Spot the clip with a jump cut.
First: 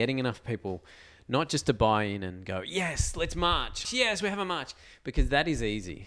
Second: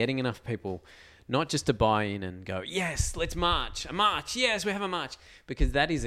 first; 1 cut; at 3.8 s

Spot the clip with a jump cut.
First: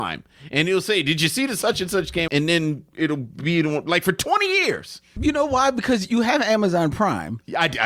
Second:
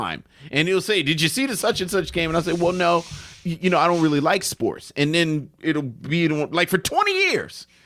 first; 2 cuts; at 2.3 s, 5.2 s

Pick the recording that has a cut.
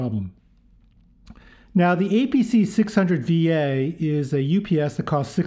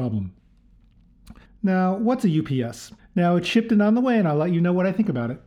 second; 2 cuts; at 1.4 s, 3.0 s

